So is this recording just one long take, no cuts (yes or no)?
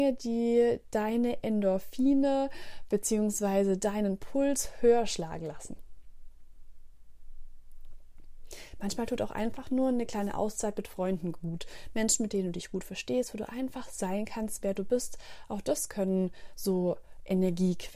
yes